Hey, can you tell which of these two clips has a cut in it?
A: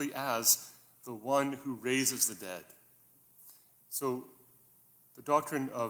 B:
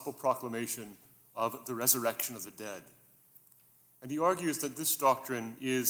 A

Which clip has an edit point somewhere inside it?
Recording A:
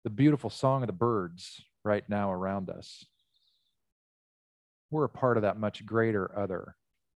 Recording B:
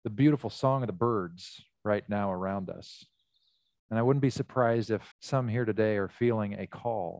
B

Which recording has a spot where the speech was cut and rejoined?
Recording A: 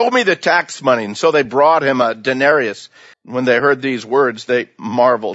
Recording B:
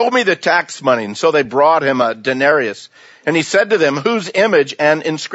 A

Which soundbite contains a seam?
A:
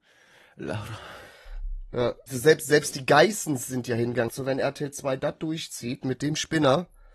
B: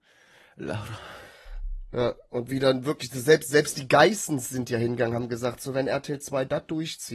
A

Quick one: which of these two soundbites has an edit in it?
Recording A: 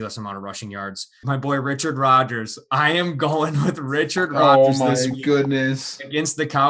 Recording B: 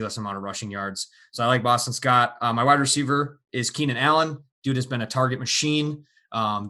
A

